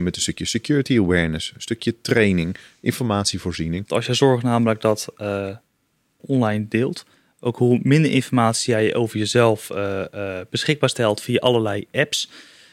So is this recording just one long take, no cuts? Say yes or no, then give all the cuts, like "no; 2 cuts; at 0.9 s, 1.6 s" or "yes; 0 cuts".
no; 2 cuts; at 3.9 s, 6.2 s